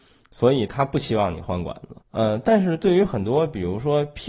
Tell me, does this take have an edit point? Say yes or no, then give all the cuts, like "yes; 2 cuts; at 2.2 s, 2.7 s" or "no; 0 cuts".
yes; 1 cut; at 2.0 s